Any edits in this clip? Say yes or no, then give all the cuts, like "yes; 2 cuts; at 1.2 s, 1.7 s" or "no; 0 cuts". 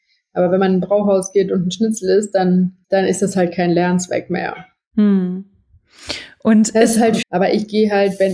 yes; 2 cuts; at 2.8 s, 7.2 s